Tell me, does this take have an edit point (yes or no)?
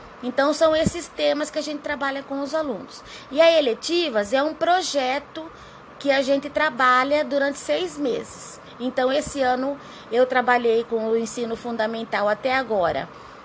no